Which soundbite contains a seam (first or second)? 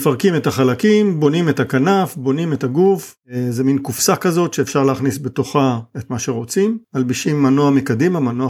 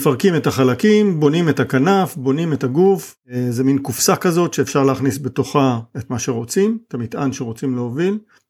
first